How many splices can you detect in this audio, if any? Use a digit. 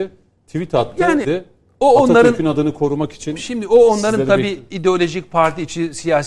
1